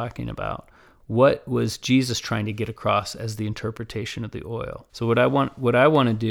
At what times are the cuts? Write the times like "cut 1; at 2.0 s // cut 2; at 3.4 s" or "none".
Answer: cut 1; at 4.9 s

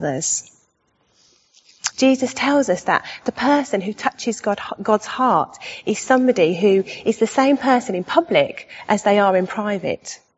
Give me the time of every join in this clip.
cut 1; at 1.9 s

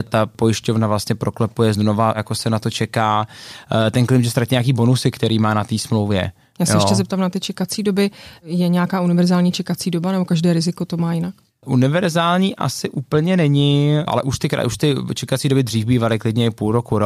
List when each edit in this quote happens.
none

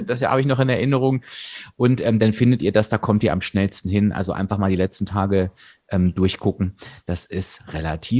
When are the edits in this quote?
none

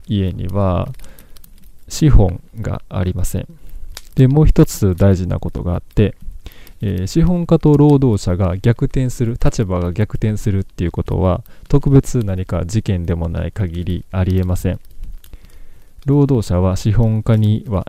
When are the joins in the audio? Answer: cut 1; at 4.1 s

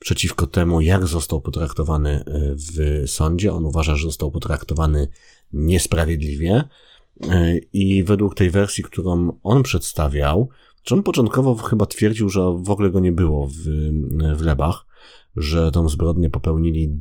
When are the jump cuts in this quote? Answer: none

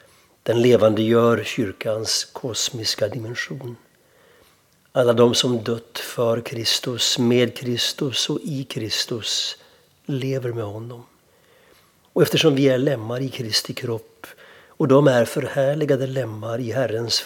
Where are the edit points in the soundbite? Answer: none

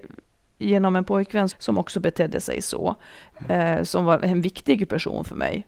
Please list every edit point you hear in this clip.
cut 1; at 1.5 s

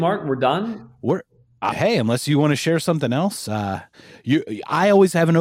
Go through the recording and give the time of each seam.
cut 1; at 1.7 s

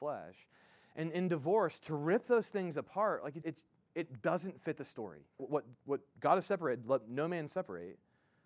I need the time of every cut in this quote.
cut 1; at 3.4 s // cut 2; at 5.4 s

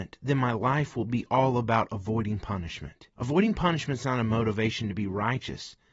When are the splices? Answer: cut 1; at 3.1 s

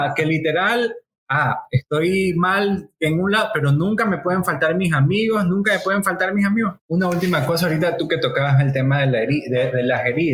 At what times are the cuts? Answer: cut 1; at 6.8 s

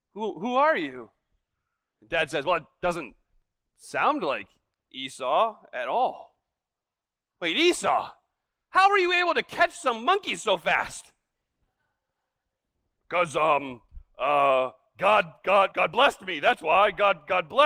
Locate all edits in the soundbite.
cut 1; at 1.9 s // cut 2; at 15.7 s

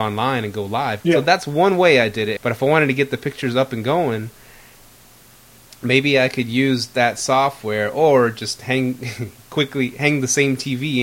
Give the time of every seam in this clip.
cut 1; at 1.0 s // cut 2; at 2.4 s

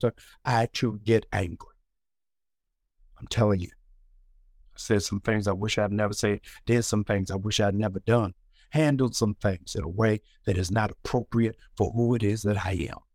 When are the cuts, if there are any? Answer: none

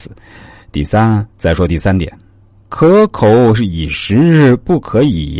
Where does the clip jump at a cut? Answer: cut 1; at 1.3 s

